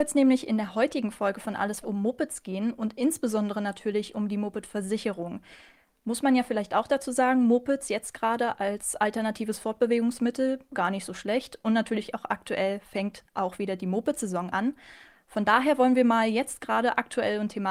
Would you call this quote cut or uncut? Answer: cut